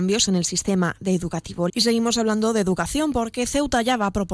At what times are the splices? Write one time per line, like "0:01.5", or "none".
0:01.7